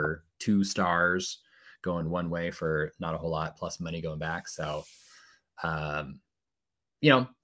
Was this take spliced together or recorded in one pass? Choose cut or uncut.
uncut